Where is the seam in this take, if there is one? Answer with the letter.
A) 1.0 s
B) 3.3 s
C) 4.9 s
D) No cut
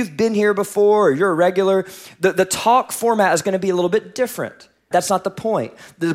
C